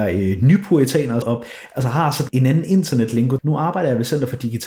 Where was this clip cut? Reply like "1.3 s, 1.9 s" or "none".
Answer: 1.2 s, 2.3 s, 3.4 s